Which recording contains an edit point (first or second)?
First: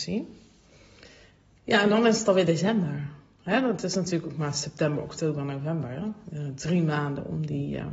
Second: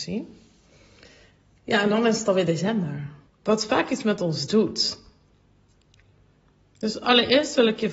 second